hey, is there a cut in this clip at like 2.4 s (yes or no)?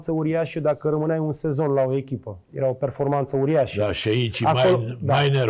yes